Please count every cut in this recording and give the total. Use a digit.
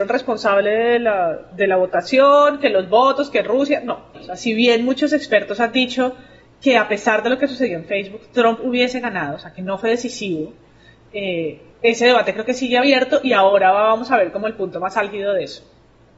1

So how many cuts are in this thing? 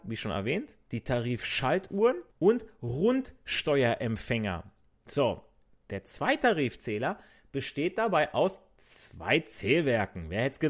1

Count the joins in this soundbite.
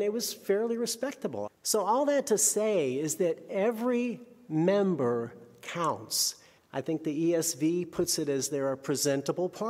2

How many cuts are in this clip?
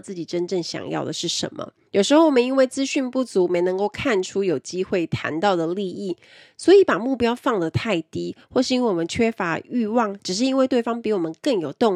1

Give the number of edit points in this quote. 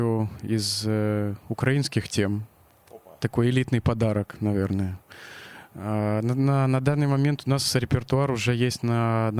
1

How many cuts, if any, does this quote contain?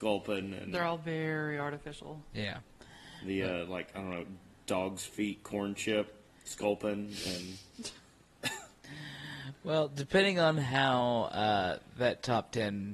0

